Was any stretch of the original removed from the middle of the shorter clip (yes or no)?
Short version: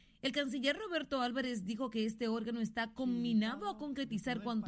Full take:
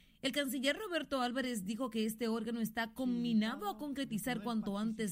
no